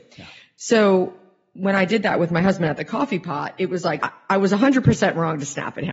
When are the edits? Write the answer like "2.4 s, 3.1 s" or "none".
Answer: 4.0 s